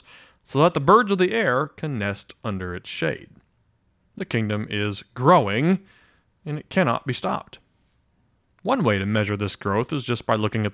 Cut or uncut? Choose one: uncut